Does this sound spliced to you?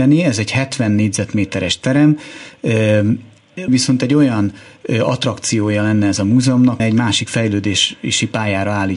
yes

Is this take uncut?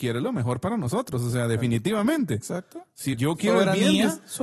no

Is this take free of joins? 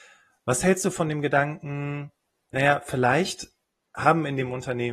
yes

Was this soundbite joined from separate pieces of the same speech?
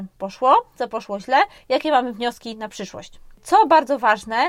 yes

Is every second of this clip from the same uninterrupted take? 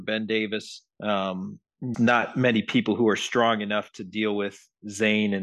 no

